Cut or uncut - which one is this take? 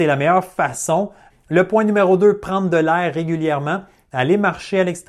cut